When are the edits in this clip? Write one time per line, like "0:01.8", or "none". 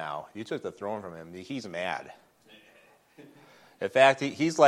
none